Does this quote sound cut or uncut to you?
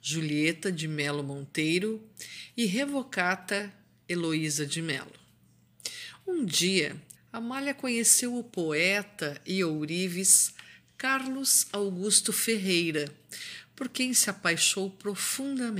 cut